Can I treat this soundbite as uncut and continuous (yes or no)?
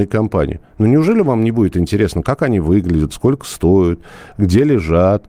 yes